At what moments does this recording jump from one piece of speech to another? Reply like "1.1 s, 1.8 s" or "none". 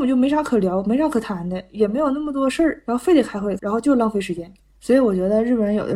3.6 s